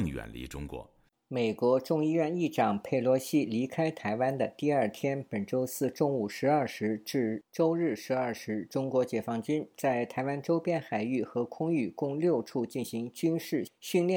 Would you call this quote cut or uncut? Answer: cut